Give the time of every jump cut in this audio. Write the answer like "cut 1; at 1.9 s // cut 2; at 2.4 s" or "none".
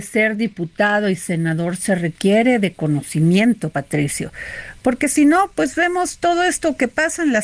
none